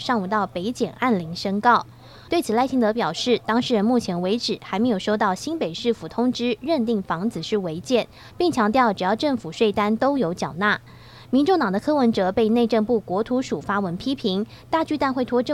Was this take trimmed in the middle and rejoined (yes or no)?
yes